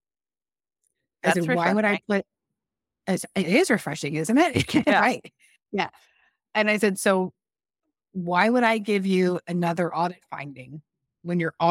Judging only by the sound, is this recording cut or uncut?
cut